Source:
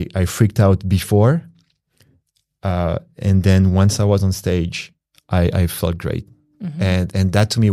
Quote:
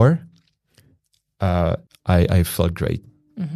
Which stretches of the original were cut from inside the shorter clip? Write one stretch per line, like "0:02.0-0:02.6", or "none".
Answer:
0:03.1-0:05.1